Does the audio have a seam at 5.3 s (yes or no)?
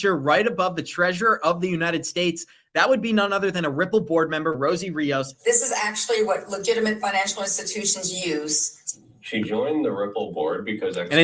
yes